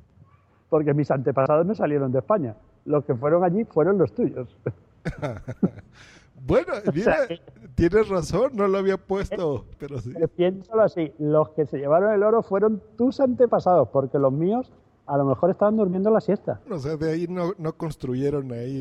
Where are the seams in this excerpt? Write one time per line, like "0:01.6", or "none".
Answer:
0:09.7
0:16.7